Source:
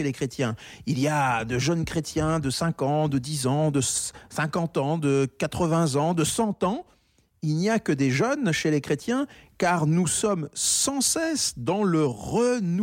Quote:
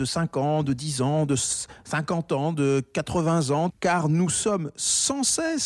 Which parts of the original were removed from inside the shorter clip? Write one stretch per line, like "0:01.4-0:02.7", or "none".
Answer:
0:06.1-0:09.5